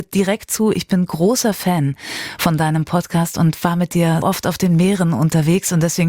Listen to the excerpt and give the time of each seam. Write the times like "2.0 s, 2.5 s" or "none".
4.2 s